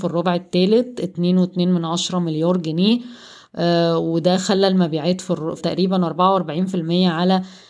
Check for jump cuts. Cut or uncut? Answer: cut